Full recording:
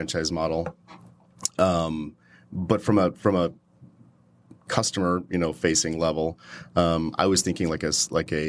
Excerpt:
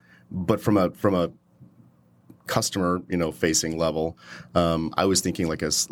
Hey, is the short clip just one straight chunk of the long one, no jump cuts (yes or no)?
yes